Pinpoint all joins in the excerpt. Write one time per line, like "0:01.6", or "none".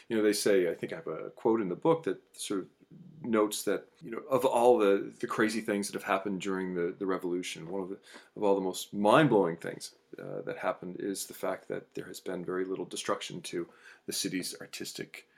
none

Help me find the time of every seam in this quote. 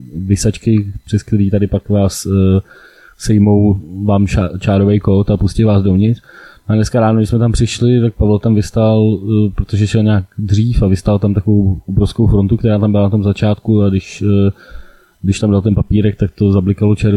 none

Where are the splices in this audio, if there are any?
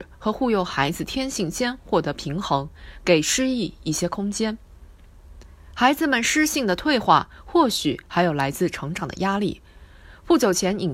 none

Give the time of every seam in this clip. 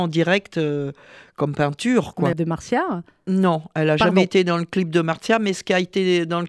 0:02.3

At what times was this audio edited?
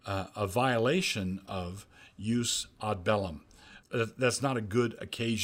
0:03.8

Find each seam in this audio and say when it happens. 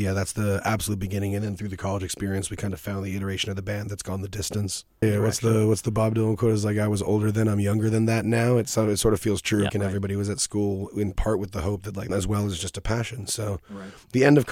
0:05.0
0:09.7
0:12.1

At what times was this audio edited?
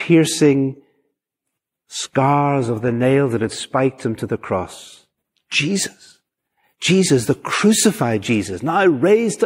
none

